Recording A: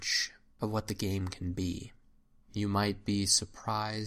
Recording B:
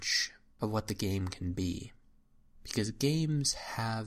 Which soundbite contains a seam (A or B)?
A